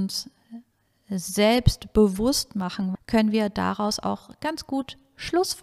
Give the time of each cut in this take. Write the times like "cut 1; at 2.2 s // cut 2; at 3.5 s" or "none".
cut 1; at 2.9 s